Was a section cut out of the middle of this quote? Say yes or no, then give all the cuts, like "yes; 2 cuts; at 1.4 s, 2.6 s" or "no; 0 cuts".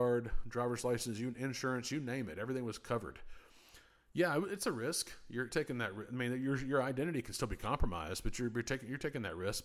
yes; 1 cut; at 5.5 s